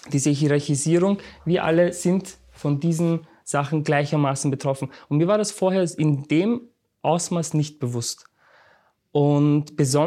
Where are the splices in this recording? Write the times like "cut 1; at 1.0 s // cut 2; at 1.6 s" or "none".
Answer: none